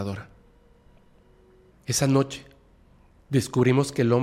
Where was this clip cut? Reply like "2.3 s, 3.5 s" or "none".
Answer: 1.7 s

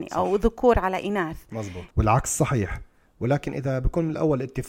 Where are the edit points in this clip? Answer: 1.9 s

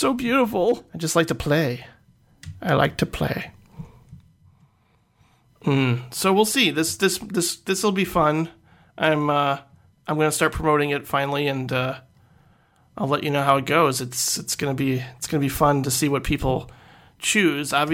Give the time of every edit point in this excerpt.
none

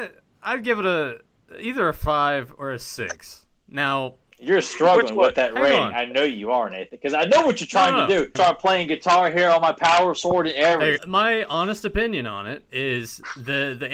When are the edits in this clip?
8.4 s, 11.0 s

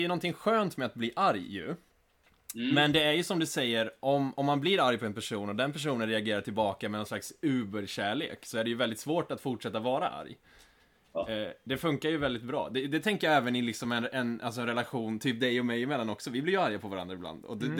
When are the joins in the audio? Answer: none

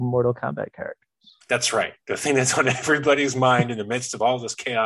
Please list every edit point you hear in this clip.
none

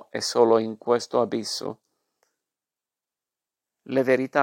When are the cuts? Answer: none

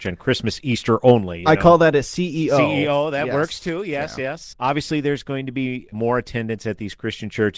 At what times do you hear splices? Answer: 4.5 s, 5.9 s

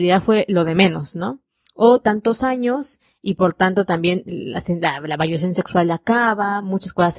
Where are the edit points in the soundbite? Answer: none

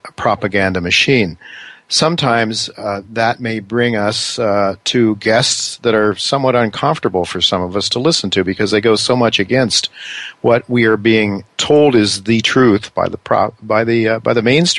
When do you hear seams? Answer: 11.5 s

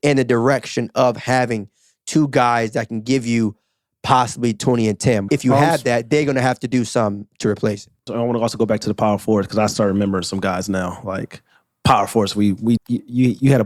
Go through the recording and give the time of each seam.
5.3 s, 8.1 s, 12.8 s

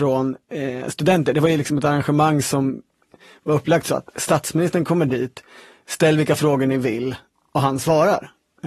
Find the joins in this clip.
none

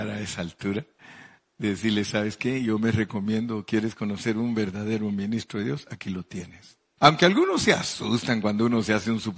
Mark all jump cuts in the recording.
7.0 s

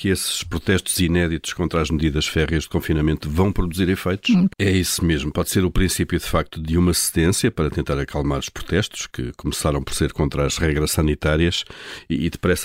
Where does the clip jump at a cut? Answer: 4.5 s

